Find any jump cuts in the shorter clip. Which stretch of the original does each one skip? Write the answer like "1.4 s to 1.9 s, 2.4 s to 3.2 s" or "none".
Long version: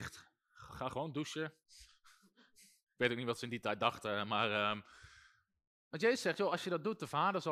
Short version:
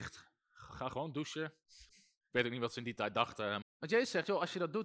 1.9 s to 2.5 s, 4.3 s to 5.7 s